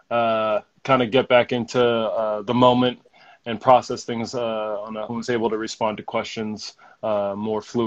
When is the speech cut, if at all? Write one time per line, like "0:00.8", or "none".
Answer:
0:05.1

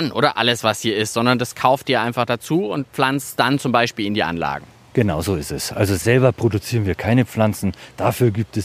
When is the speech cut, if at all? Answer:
none

